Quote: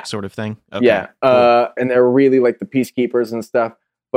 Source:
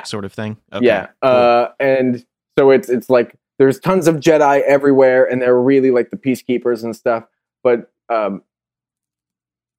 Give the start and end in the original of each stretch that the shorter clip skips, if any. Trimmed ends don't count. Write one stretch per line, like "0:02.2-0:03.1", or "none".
0:01.8-0:05.3